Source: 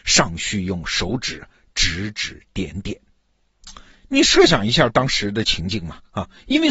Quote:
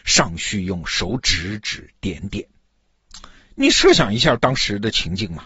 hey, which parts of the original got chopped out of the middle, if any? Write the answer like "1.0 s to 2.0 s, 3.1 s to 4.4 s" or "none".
1.2 s to 1.7 s